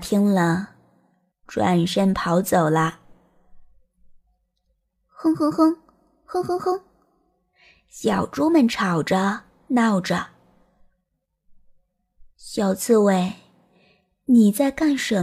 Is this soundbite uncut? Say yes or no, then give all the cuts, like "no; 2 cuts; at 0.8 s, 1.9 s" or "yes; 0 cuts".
no; 1 cut; at 1.3 s